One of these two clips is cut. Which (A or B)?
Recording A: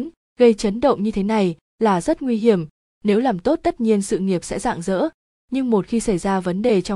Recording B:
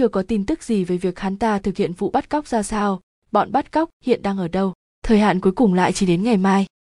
B